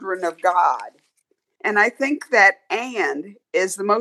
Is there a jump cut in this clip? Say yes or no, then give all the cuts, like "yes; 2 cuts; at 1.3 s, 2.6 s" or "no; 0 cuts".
yes; 1 cut; at 1.6 s